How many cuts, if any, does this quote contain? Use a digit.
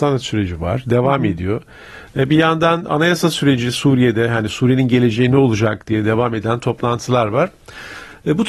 1